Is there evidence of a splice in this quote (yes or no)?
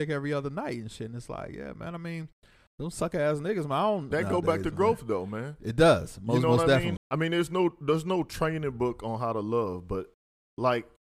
yes